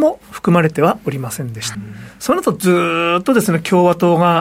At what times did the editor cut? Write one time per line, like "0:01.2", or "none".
0:01.7